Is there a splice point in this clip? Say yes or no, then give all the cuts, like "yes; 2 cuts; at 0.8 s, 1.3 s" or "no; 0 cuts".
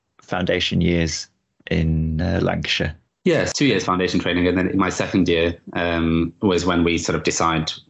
no; 0 cuts